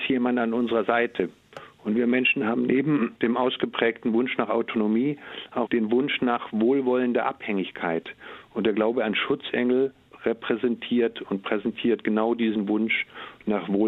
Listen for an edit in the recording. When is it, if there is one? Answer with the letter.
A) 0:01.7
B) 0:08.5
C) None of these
C